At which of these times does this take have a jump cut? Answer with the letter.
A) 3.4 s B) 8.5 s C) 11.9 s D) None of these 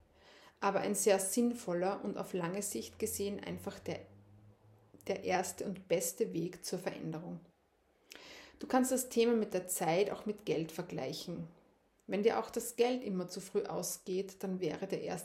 D